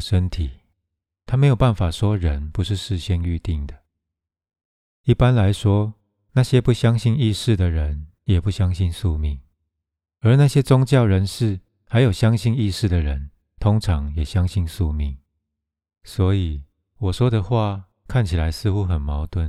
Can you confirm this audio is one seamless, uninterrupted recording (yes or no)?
yes